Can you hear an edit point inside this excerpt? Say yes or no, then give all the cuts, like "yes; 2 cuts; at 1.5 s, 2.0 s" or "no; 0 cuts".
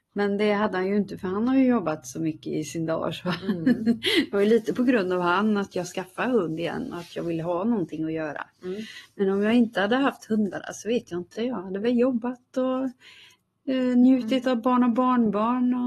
no; 0 cuts